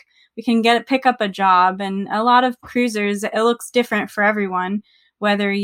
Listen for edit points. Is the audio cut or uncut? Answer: uncut